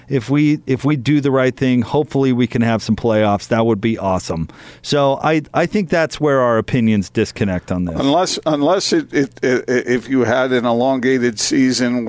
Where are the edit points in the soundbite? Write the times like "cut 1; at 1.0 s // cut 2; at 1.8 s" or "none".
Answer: none